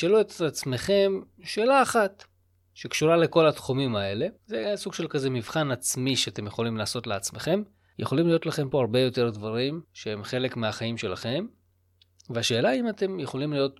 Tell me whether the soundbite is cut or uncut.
cut